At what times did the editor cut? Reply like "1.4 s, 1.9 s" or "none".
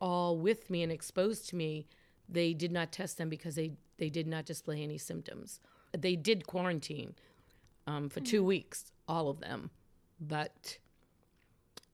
5.9 s